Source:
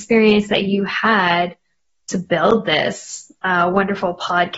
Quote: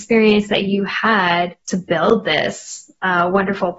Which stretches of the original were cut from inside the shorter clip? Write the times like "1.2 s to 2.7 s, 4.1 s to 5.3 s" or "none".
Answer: 1.6 s to 2.0 s